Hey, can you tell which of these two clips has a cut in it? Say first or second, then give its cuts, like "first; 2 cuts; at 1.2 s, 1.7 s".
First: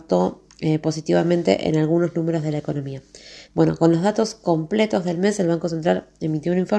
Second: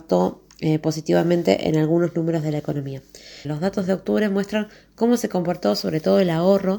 second; 1 cut; at 3.4 s